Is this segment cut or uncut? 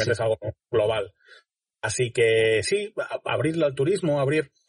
uncut